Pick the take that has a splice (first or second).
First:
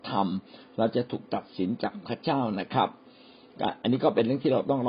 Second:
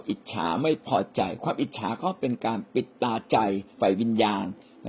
second